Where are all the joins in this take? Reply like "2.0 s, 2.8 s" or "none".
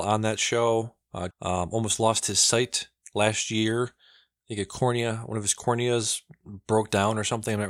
1.3 s